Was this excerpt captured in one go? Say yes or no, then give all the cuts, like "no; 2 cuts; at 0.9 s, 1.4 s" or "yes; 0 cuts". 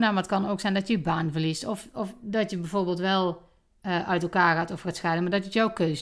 yes; 0 cuts